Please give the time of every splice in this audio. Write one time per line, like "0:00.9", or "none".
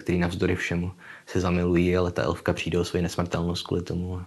none